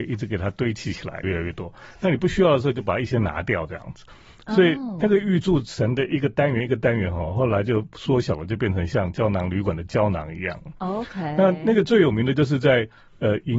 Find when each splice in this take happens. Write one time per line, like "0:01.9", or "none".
0:01.2